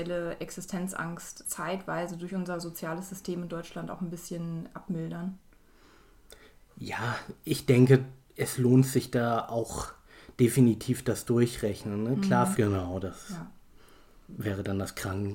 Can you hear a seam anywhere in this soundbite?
yes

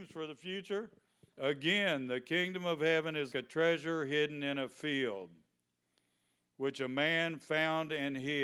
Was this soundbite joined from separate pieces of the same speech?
yes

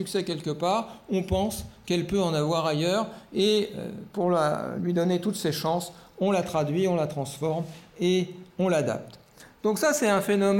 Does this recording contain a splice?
no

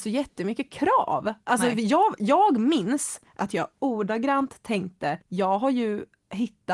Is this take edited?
yes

